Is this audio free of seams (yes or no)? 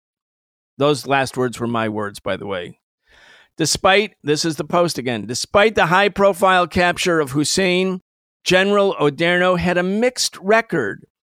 yes